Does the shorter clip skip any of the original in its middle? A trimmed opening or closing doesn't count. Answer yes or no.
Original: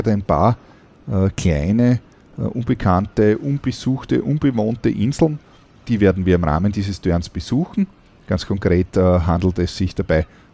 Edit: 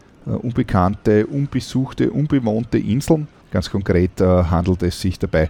yes